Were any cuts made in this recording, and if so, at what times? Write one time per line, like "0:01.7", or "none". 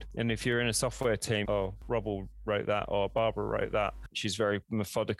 0:01.4
0:04.1